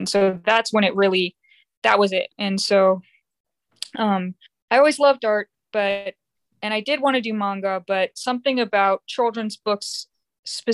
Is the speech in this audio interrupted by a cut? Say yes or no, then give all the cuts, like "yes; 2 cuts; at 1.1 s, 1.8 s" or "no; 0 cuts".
yes; 1 cut; at 2.3 s